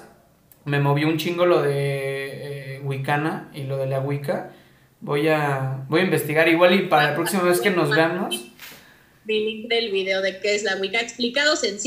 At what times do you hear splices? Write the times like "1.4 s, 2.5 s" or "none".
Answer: none